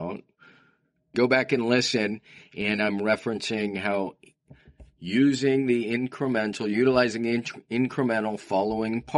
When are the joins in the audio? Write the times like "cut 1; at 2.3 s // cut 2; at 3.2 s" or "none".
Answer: cut 1; at 1.1 s